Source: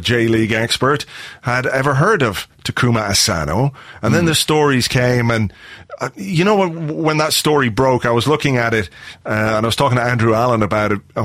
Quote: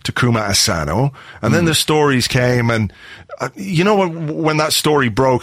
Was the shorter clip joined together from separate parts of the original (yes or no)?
no